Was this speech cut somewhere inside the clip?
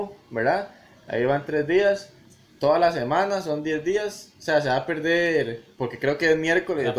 no; 0 cuts

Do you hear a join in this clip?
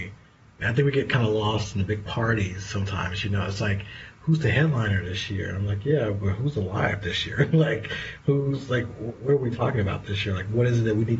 no; 0 cuts

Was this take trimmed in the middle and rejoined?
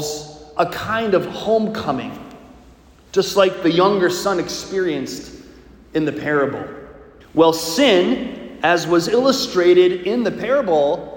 yes; 1 cut; at 7.2 s

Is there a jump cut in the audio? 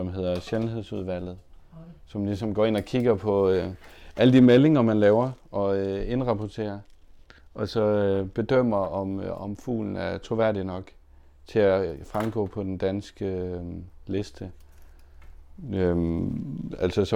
no; 0 cuts

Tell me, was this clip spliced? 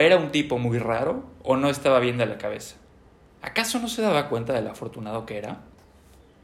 no; 0 cuts

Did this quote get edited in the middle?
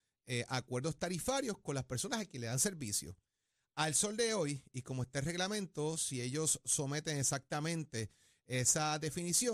no; 0 cuts

